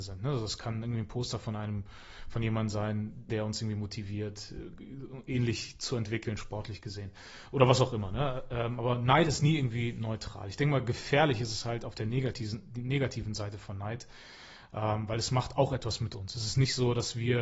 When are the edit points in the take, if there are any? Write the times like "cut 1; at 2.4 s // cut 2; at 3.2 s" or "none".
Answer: cut 1; at 3.3 s